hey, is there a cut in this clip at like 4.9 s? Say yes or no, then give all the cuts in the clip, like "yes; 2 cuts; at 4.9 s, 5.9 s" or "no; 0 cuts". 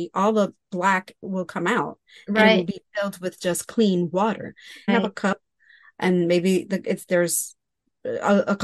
yes; 1 cut; at 4.9 s